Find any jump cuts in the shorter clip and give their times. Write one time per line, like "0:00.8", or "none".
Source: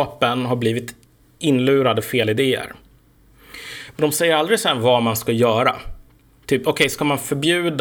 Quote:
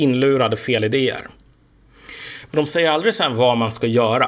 none